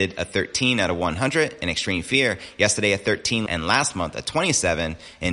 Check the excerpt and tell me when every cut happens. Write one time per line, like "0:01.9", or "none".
0:03.5